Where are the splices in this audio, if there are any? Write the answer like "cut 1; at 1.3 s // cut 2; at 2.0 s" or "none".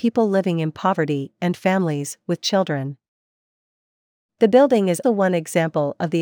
cut 1; at 5.0 s